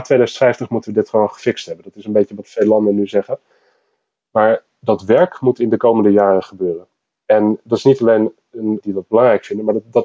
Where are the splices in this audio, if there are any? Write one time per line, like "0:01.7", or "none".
0:08.8